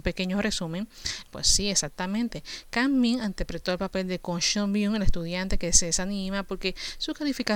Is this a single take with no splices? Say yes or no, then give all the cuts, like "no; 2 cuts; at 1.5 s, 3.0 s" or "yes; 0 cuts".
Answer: no; 1 cut; at 1.3 s